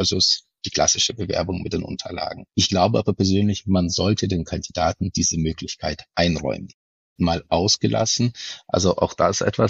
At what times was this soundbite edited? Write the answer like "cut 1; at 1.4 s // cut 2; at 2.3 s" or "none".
cut 1; at 2.5 s // cut 2; at 7.2 s